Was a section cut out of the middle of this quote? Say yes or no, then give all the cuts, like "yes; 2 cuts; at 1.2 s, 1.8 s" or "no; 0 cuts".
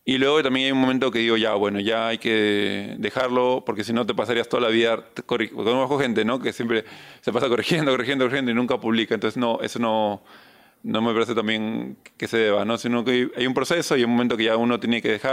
no; 0 cuts